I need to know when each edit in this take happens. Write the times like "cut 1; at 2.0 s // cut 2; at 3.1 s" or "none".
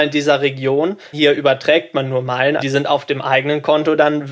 cut 1; at 1.1 s // cut 2; at 2.6 s